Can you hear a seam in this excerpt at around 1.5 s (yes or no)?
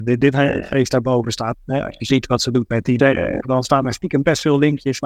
yes